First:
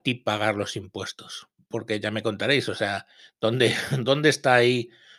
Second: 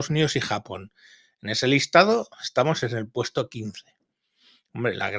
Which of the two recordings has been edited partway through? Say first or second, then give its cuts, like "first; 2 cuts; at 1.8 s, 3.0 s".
first; 1 cut; at 1.6 s